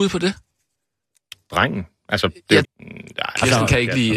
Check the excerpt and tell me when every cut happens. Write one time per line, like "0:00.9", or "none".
0:02.6